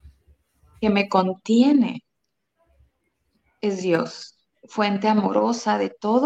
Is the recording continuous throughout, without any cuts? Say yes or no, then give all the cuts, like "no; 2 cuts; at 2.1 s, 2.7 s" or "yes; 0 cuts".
yes; 0 cuts